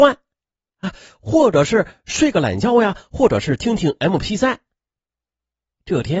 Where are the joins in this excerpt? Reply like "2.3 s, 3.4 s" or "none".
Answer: none